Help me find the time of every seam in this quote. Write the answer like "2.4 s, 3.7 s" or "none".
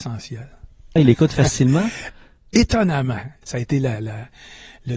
1.0 s, 3.4 s

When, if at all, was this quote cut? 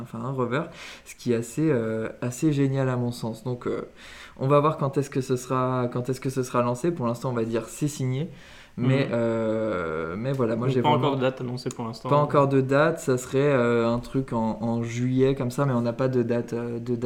none

